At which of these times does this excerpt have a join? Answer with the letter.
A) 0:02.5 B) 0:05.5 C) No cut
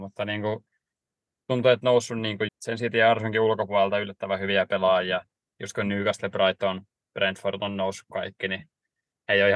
A